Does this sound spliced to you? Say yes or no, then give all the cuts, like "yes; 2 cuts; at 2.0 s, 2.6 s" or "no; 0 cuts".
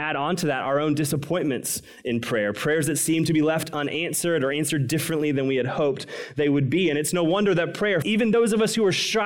yes; 1 cut; at 8.0 s